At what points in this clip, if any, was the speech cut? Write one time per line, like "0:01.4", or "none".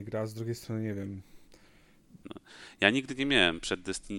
0:02.2